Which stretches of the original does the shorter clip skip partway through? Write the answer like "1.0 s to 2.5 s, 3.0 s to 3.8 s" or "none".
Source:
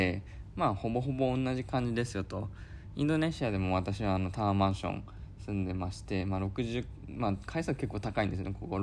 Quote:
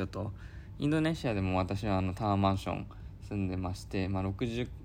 none